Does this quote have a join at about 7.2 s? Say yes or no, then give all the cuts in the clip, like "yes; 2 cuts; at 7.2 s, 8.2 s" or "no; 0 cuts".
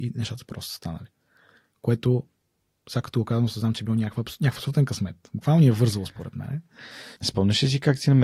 yes; 1 cut; at 7.2 s